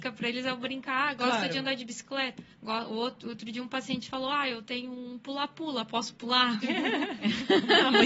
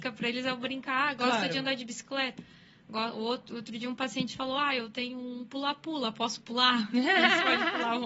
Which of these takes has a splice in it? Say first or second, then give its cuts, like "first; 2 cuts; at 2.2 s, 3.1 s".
first; 2 cuts; at 2.5 s, 6.6 s